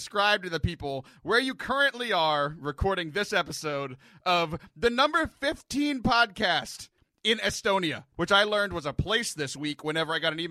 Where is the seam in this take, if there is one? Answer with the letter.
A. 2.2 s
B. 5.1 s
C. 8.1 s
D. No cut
C